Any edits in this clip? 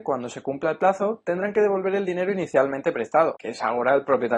yes; 1 cut; at 3.4 s

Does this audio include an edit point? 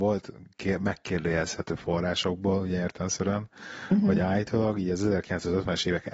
no; 0 cuts

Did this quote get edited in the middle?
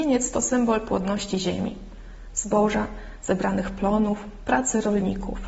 no; 0 cuts

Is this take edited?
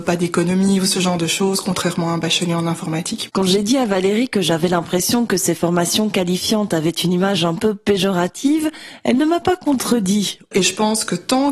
yes; 2 cuts; at 3.3 s, 10.5 s

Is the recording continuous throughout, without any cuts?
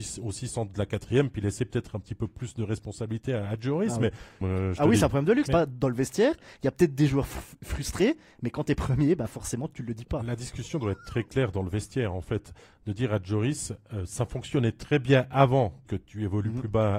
no; 3 cuts; at 4.4 s, 5.5 s, 15.8 s

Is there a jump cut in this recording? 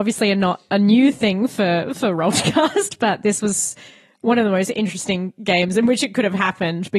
no; 0 cuts

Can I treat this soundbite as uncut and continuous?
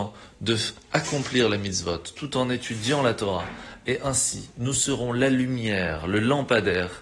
yes; 0 cuts

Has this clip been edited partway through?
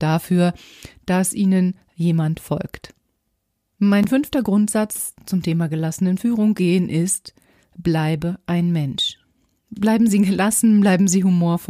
no; 0 cuts

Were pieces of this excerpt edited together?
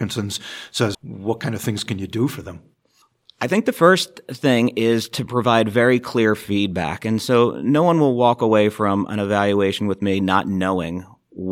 yes; 1 cut; at 0.9 s

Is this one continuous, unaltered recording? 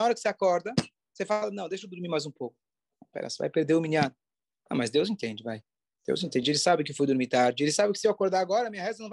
yes; 0 cuts

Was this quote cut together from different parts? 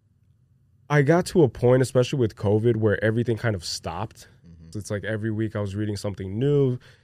yes; 1 cut; at 4.7 s

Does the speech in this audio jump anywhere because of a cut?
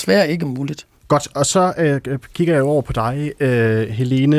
no; 0 cuts

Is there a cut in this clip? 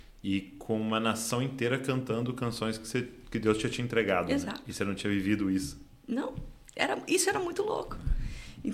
no; 0 cuts

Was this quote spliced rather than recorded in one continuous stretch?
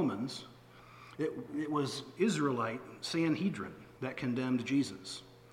yes; 1 cut; at 4.0 s

